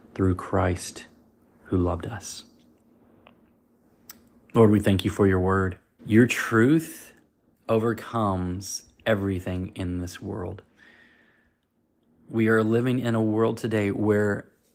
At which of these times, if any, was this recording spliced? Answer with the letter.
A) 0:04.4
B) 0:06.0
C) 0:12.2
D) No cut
B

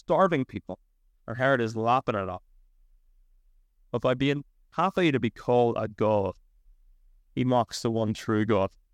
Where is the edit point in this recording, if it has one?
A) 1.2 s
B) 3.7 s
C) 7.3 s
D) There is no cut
A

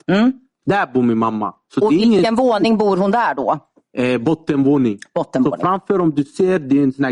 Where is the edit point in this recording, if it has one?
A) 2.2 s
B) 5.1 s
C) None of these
C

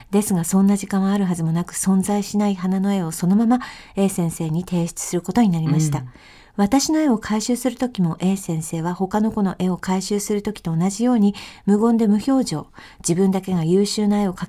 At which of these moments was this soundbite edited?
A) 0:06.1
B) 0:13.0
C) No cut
C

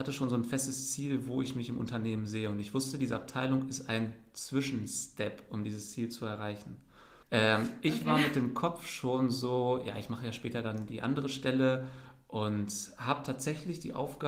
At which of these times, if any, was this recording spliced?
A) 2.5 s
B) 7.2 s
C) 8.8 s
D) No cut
B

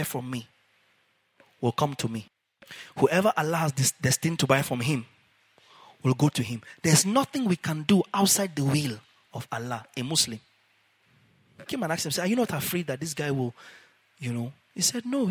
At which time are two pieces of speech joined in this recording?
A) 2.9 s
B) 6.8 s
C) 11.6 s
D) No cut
C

